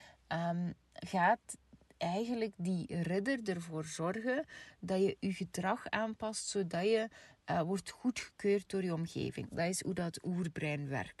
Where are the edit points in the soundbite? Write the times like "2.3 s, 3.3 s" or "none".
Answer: 1.0 s, 9.4 s